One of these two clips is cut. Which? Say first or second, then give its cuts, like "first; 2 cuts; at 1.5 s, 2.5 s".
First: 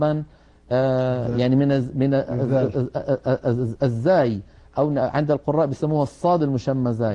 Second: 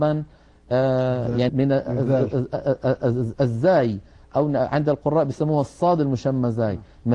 second; 1 cut; at 1.5 s